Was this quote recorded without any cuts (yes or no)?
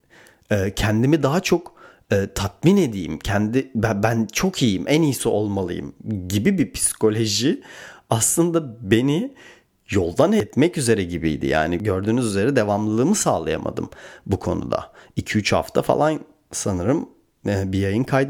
yes